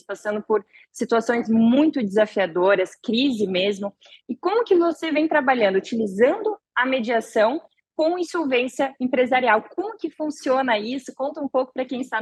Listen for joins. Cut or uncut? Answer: uncut